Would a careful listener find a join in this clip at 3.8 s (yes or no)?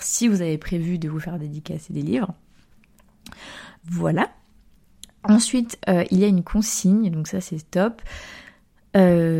yes